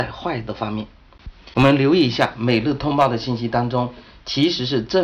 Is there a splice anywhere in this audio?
no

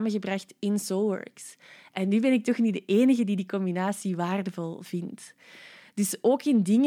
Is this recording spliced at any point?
no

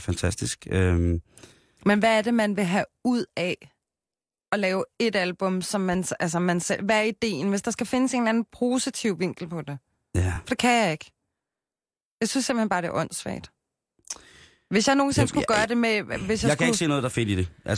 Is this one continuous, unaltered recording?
yes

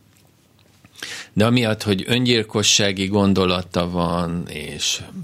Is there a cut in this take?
no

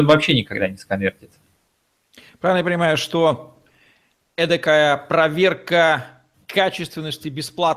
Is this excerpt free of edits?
yes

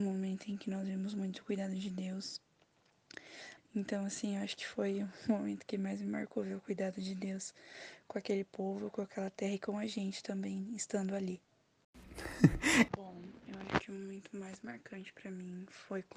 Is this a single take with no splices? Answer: no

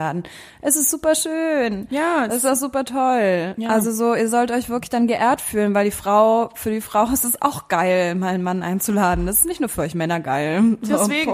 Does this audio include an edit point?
no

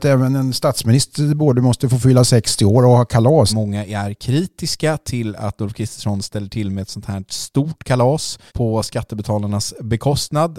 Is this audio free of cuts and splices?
no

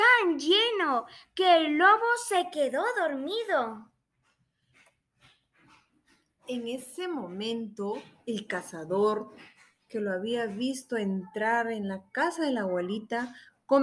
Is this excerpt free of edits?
yes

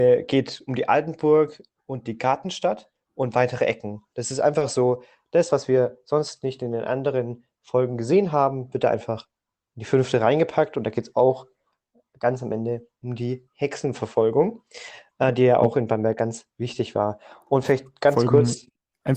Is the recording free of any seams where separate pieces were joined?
yes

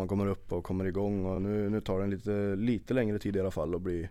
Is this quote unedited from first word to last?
yes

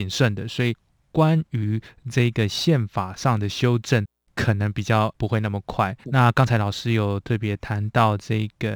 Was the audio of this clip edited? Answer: yes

